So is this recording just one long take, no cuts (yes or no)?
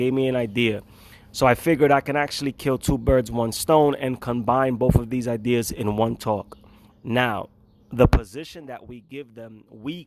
no